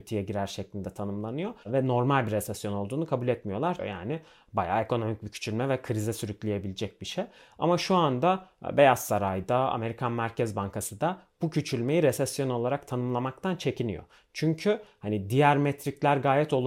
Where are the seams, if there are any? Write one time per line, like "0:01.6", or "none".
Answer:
0:01.6
0:03.8